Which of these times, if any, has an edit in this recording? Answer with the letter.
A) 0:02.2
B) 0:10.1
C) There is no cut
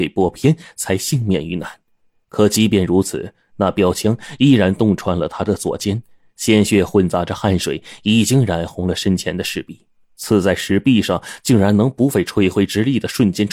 B